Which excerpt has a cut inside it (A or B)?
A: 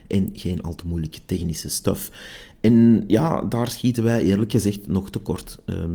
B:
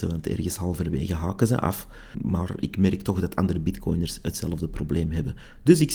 B